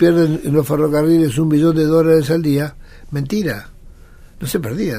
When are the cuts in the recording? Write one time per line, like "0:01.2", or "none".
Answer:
none

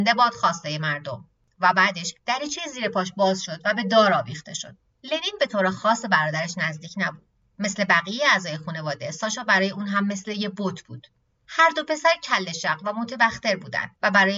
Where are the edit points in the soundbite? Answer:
none

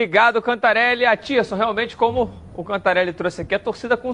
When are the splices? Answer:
none

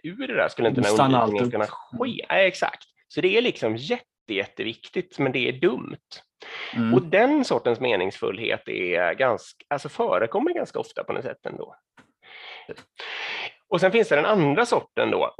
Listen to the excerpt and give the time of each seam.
0:12.7

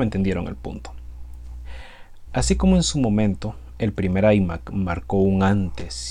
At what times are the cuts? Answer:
0:02.3

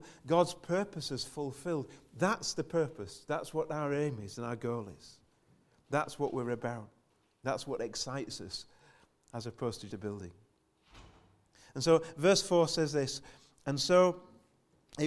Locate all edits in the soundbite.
0:09.9

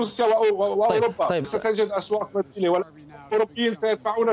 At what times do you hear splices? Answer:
0:01.4

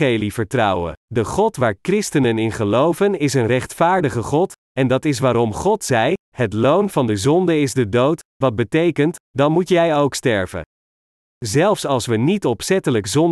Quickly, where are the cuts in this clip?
0:01.0
0:09.2

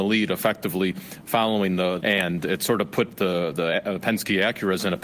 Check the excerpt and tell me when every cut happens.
0:02.0

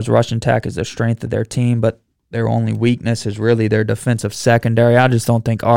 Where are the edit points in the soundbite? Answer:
none

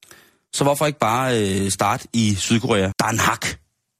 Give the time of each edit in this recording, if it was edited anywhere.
0:02.9

